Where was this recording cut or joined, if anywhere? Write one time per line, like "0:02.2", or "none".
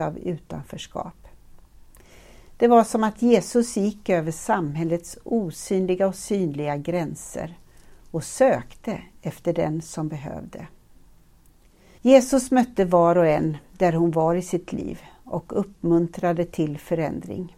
0:12.0